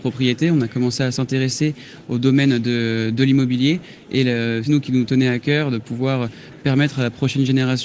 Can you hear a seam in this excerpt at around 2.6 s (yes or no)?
no